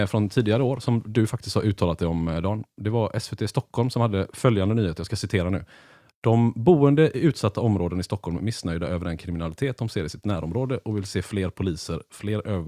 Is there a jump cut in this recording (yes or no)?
no